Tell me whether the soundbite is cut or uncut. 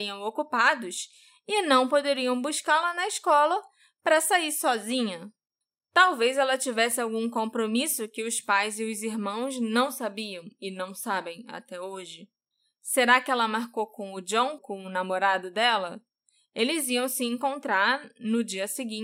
cut